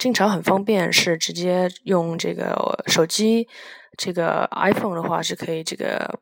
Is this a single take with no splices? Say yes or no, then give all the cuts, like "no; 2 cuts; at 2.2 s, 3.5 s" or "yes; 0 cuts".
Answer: yes; 0 cuts